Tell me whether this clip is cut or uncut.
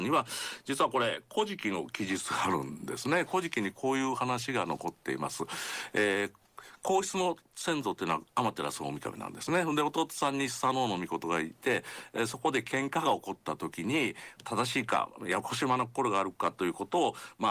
cut